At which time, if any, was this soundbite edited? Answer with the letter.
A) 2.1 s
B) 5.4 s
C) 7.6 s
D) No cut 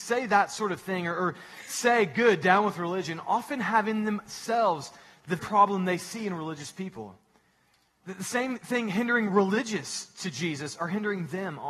B